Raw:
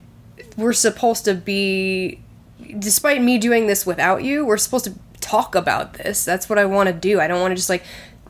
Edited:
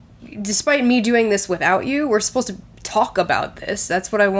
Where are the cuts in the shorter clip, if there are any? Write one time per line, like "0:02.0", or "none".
none